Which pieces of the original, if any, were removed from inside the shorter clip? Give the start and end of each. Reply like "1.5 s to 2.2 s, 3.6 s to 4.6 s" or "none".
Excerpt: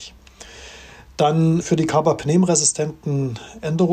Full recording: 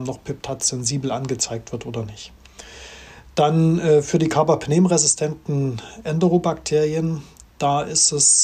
3.8 s to 4.0 s